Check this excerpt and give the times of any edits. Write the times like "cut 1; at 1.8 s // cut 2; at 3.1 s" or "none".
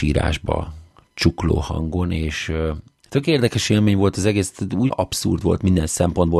cut 1; at 4.9 s